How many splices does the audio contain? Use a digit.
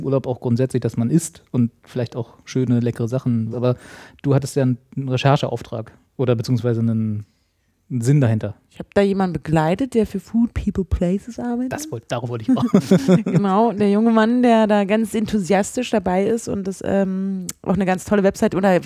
1